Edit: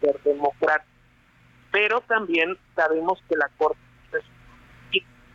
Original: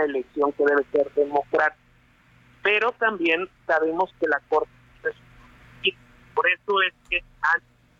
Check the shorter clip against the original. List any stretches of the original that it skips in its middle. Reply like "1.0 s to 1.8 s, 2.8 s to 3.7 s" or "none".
none